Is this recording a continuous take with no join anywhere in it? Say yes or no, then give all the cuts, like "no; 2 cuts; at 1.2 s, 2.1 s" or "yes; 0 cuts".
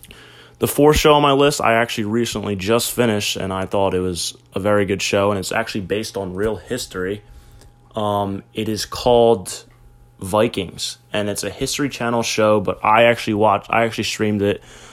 yes; 0 cuts